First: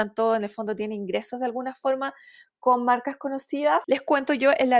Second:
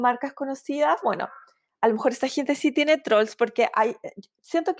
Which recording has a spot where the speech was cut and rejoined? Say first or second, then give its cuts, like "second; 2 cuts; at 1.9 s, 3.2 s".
first; 1 cut; at 3.8 s